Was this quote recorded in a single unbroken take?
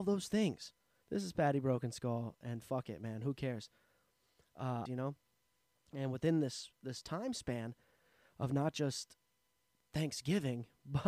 no; 2 cuts; at 1.0 s, 4.9 s

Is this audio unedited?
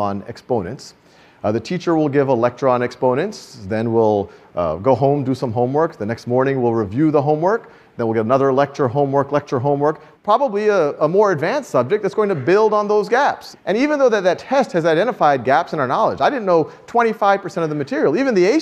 no; 2 cuts; at 10.1 s, 13.5 s

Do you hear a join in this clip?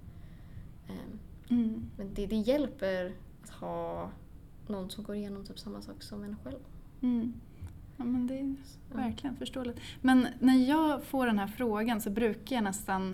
no; 0 cuts

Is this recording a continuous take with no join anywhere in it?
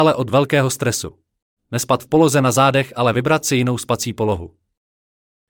no; 1 cut; at 1.6 s

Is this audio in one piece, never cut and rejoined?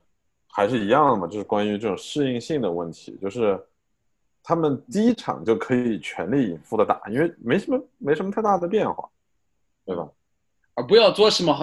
yes; 0 cuts

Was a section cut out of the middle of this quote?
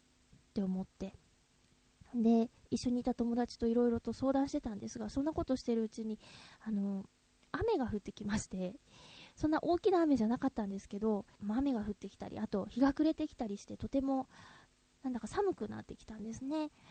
yes; 1 cut; at 11.4 s

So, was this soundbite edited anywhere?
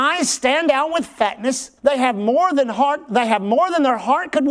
yes; 1 cut; at 1.8 s

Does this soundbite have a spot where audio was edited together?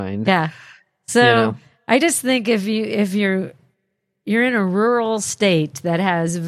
no; 0 cuts

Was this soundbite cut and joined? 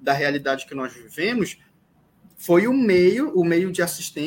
no; 0 cuts

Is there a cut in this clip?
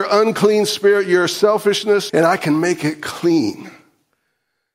yes; 1 cut; at 2.1 s

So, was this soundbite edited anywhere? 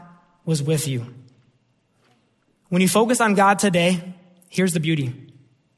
no; 0 cuts

